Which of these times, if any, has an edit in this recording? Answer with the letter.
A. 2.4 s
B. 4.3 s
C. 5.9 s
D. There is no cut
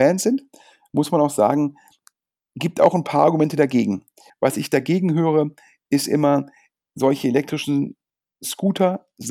B